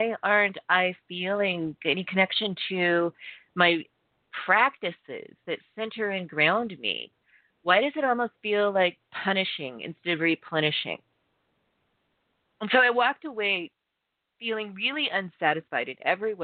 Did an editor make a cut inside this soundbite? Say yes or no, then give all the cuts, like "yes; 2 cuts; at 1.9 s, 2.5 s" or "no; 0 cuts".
no; 0 cuts